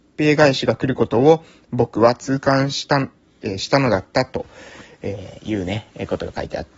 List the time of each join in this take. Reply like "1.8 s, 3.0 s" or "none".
none